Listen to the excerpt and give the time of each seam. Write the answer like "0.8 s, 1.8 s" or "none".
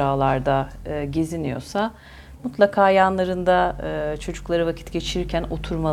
none